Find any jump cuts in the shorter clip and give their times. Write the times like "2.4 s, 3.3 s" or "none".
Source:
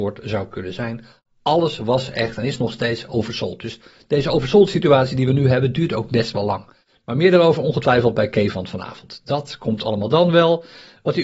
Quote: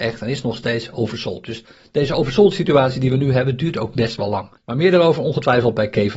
4.6 s